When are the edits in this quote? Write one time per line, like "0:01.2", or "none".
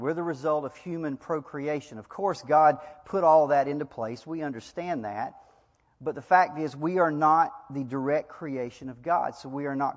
none